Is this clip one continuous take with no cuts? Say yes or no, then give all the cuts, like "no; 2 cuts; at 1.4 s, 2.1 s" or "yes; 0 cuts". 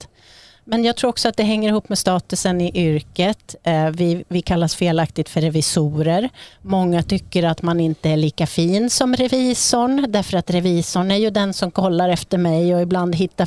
yes; 0 cuts